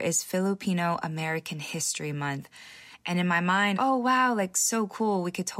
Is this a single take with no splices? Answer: no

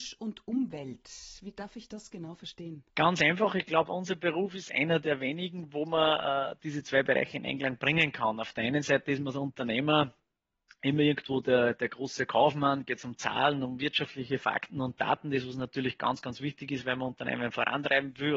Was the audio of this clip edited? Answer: yes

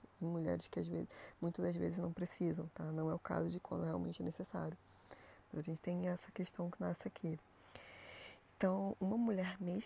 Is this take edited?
no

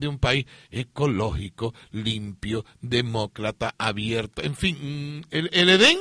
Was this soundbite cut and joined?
no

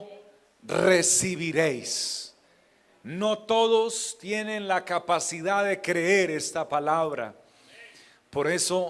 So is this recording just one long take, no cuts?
yes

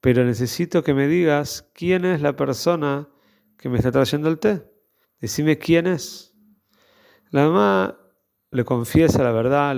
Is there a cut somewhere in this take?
yes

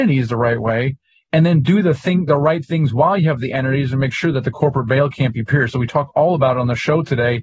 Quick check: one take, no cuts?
yes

